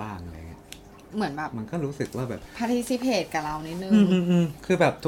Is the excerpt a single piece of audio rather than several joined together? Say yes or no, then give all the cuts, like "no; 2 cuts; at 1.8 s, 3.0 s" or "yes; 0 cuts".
yes; 0 cuts